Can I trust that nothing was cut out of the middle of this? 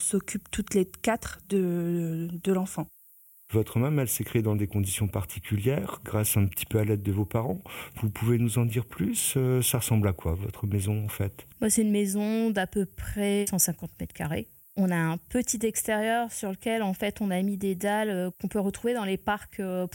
no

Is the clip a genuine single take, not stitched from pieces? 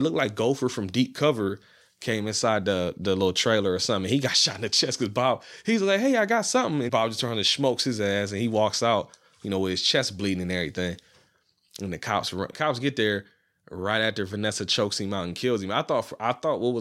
no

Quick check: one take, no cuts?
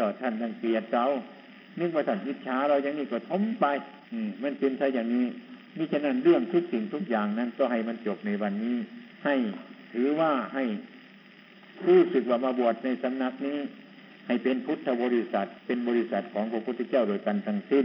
no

